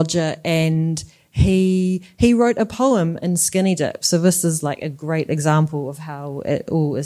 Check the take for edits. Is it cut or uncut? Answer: uncut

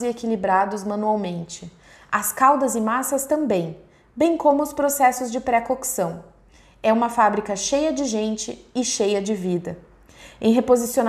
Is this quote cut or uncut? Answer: uncut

